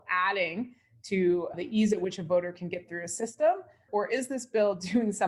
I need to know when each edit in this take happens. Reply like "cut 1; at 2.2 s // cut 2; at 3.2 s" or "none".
cut 1; at 1.5 s // cut 2; at 3.9 s